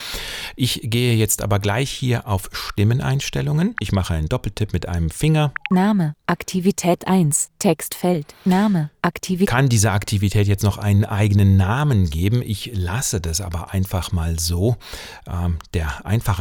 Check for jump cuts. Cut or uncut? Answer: cut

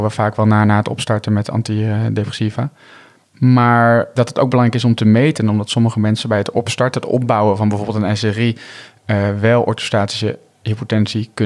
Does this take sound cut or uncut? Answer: cut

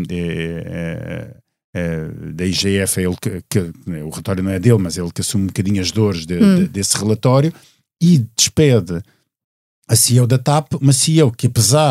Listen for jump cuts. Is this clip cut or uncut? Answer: uncut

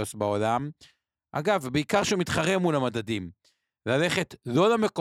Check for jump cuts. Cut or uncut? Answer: uncut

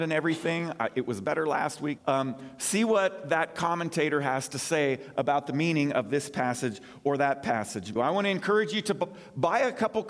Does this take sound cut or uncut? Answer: cut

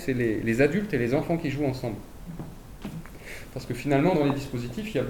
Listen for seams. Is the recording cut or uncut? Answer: uncut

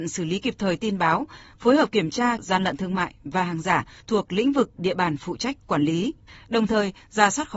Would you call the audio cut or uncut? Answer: cut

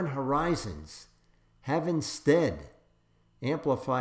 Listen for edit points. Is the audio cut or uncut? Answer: uncut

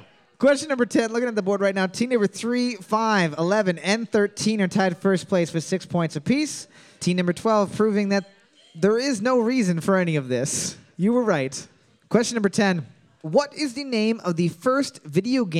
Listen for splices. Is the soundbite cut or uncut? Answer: uncut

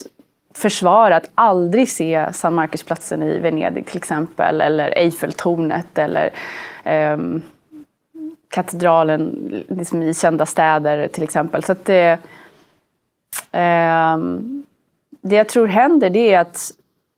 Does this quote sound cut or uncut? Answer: uncut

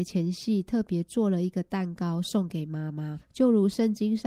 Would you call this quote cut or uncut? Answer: cut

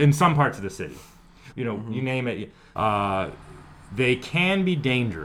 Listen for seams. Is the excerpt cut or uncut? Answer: cut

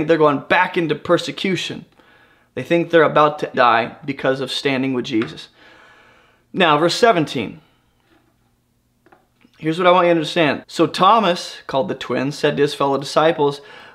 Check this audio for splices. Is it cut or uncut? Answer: cut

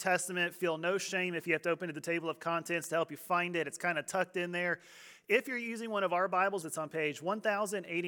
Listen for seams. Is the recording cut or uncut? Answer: cut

